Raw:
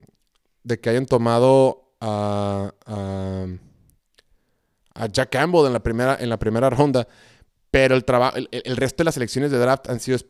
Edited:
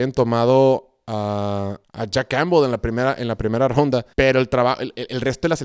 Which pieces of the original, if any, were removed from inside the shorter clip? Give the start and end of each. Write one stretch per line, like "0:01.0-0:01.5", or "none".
0:02.8-0:04.9
0:07.1-0:07.7